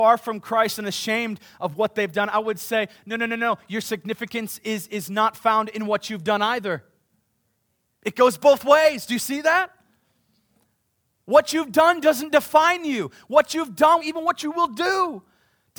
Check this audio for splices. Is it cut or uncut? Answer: cut